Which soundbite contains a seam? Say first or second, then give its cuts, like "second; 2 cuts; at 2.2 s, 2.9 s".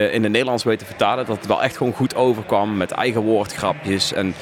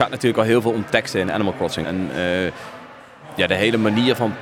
second; 1 cut; at 1.8 s